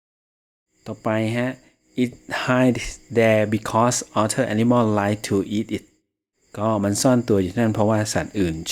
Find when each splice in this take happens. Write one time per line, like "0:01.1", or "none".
none